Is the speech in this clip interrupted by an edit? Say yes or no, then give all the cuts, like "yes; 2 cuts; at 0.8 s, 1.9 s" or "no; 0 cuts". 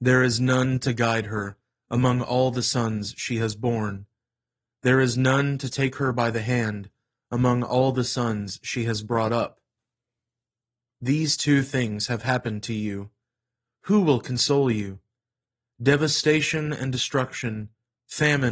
no; 0 cuts